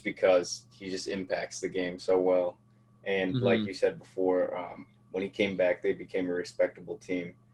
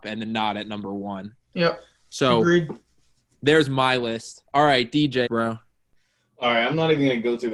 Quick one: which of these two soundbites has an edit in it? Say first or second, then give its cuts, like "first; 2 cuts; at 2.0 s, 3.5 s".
second; 1 cut; at 5.3 s